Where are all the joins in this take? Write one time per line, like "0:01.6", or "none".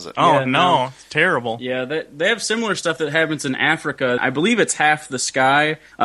0:04.2